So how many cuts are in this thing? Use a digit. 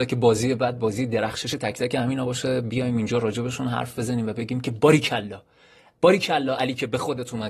0